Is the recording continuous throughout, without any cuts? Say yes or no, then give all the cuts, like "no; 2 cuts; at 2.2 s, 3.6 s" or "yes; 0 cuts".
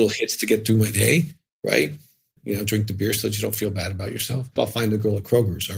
no; 2 cuts; at 2.4 s, 4.6 s